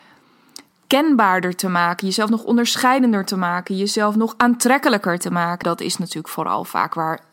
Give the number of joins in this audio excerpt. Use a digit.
1